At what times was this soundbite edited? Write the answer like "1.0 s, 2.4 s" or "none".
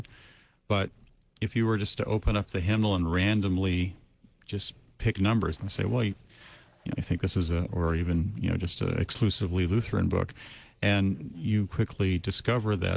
5.6 s, 7.7 s, 11.3 s